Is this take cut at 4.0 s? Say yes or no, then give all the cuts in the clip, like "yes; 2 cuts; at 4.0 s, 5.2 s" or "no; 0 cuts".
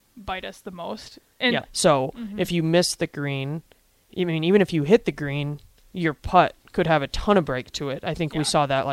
no; 1 cut; at 1.6 s